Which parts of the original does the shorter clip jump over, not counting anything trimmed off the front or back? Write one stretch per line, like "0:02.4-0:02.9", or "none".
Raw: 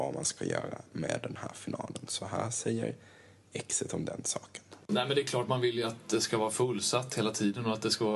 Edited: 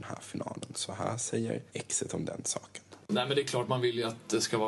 0:03.0-0:03.5